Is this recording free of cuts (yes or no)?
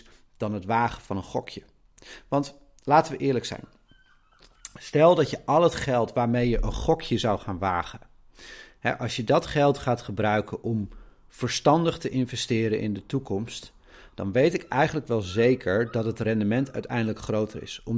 yes